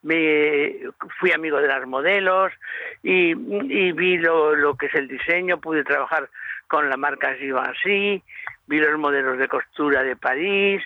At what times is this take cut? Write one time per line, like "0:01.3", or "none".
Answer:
none